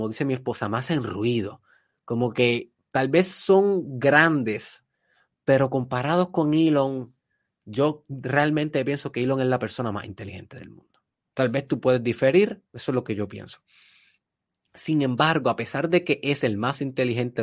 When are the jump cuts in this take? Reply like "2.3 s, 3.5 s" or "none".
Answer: none